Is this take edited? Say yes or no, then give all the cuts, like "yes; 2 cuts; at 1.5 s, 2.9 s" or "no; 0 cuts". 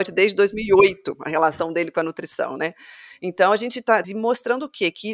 yes; 1 cut; at 4.0 s